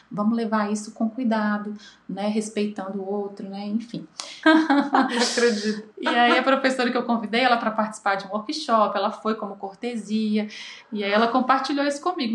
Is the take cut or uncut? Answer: cut